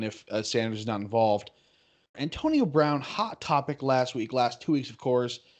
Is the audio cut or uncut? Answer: cut